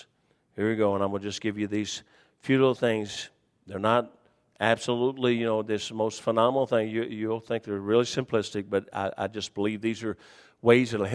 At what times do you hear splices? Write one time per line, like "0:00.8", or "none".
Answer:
none